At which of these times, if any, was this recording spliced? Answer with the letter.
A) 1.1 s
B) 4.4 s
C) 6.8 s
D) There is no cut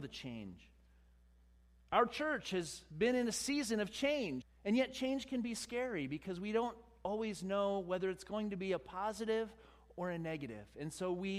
B